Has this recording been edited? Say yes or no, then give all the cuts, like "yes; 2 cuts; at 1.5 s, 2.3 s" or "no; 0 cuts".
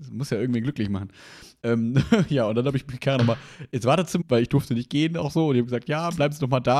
yes; 1 cut; at 4.2 s